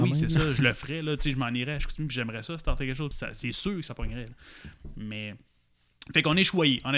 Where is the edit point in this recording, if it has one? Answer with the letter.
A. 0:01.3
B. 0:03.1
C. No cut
B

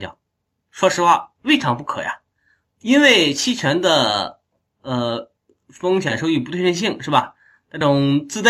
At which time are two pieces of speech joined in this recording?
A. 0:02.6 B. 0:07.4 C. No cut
A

